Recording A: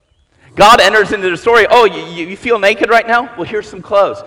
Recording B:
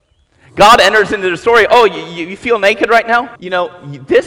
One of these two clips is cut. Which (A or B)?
B